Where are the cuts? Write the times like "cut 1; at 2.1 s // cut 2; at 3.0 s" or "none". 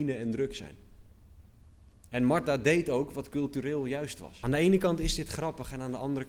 cut 1; at 1.9 s // cut 2; at 4.4 s